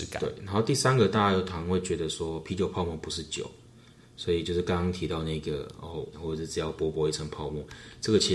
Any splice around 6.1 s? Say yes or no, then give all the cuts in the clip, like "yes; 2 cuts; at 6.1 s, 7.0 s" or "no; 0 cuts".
yes; 1 cut; at 6.1 s